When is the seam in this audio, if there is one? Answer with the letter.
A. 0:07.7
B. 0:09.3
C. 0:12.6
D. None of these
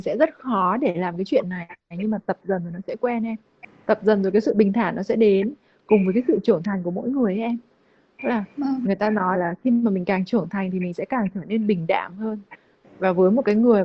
B